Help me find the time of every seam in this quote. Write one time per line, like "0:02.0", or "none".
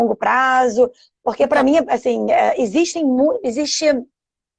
none